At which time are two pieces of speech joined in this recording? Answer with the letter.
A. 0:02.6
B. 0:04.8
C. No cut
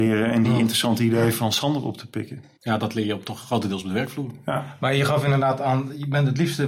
A